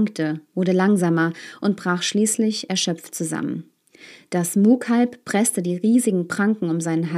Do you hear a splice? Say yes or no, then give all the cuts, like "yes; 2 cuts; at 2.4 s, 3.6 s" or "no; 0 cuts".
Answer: no; 0 cuts